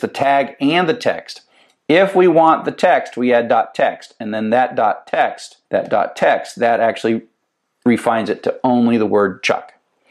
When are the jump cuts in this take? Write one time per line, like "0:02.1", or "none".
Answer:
0:05.6